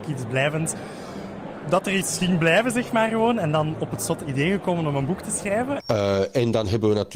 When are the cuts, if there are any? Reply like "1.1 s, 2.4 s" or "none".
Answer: 5.8 s